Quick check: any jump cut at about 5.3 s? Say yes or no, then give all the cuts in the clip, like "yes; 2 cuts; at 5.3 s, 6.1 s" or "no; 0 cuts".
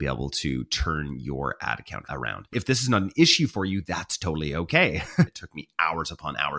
yes; 2 cuts; at 2.5 s, 5.3 s